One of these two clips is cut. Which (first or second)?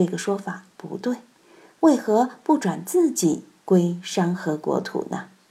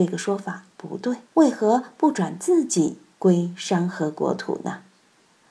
second